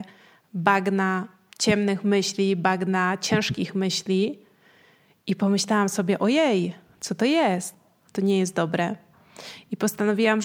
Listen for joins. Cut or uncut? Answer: cut